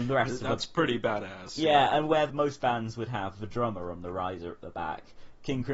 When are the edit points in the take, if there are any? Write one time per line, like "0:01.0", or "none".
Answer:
none